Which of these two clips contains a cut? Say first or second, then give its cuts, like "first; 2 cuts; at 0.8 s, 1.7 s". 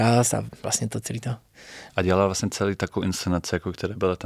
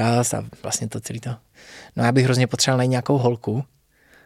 first; 1 cut; at 1.9 s